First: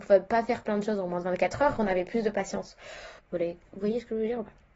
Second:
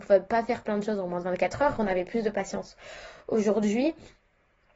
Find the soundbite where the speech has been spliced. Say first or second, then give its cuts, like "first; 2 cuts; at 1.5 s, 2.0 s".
first; 1 cut; at 3.2 s